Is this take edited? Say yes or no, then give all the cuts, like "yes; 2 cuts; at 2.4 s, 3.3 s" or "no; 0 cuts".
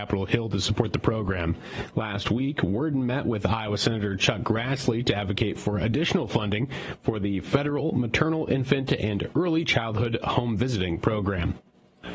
no; 0 cuts